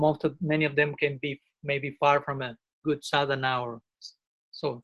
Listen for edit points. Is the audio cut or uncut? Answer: uncut